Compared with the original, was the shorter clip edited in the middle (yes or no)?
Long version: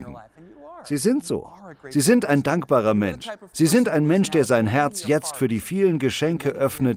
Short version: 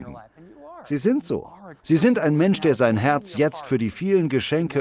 yes